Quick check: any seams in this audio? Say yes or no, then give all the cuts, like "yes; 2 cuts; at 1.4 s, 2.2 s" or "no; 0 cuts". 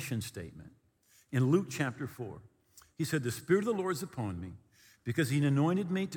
no; 0 cuts